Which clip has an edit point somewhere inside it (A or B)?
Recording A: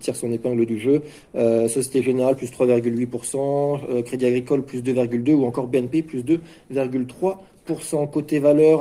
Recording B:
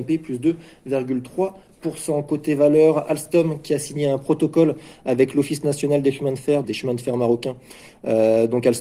B